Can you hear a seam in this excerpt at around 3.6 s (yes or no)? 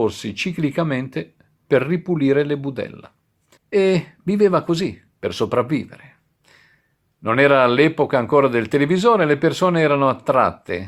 yes